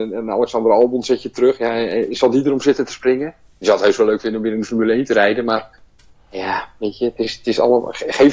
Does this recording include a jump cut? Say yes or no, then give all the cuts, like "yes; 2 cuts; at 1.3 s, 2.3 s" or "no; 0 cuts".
no; 0 cuts